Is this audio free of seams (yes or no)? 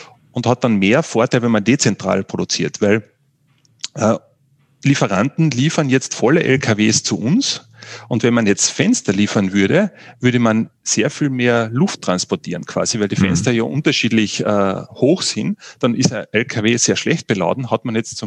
yes